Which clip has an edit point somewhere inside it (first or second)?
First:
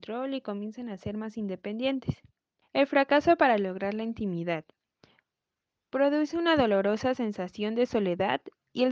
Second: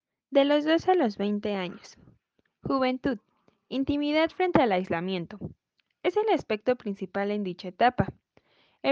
first